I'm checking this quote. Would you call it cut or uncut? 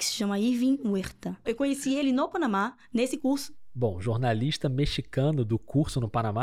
cut